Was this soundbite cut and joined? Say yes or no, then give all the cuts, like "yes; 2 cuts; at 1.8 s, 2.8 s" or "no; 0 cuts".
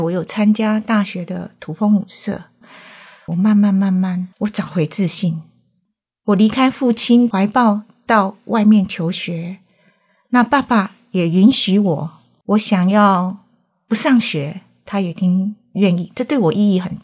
no; 0 cuts